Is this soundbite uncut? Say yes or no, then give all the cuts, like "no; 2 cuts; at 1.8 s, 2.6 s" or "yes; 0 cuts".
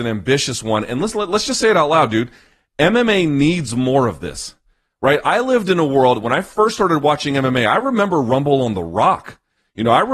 yes; 0 cuts